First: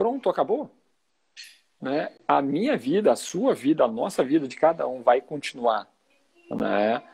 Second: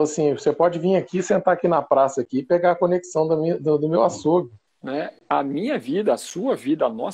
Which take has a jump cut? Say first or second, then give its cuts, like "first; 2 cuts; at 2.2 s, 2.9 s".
second; 1 cut; at 4.7 s